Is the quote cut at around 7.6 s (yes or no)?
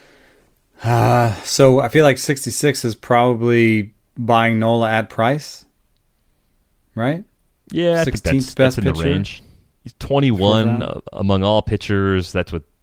no